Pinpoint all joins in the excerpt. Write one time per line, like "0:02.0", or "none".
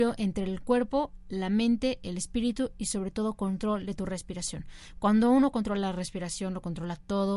none